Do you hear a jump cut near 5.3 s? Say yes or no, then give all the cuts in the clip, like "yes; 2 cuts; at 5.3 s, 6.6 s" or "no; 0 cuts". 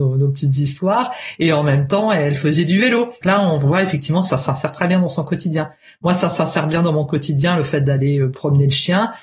no; 1 cut; at 3.2 s